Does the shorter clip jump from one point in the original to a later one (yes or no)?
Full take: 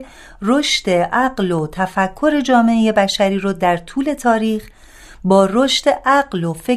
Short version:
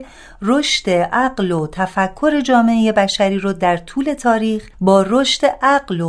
yes